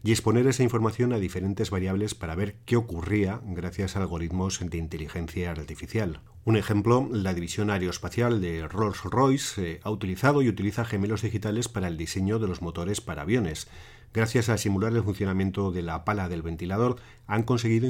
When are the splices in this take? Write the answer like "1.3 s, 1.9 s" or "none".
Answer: none